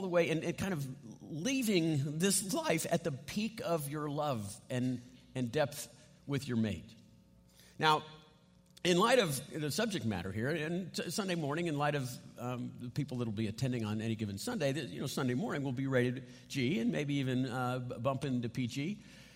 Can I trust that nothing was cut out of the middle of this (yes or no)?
yes